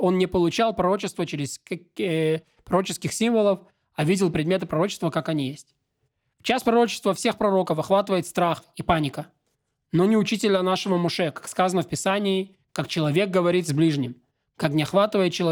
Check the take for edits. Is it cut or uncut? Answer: uncut